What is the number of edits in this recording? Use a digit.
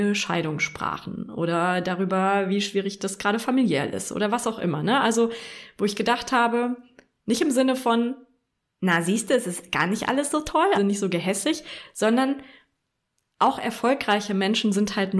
1